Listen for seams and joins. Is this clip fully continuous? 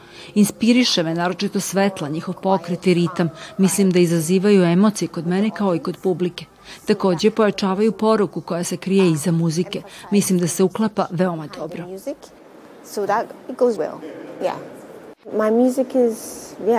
no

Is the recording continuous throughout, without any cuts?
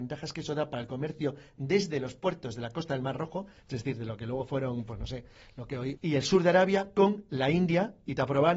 no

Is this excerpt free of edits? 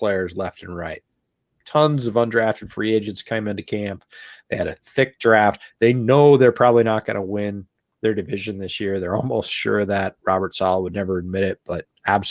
yes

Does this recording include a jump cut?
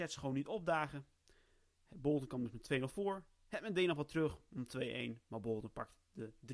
no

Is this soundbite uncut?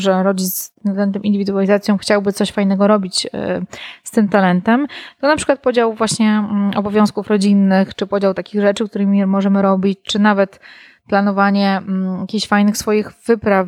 yes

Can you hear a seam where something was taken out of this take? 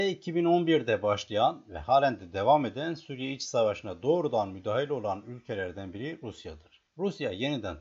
yes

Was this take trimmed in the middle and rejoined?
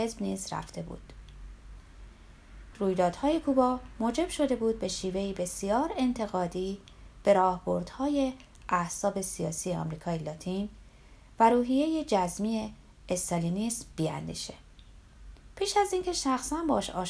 yes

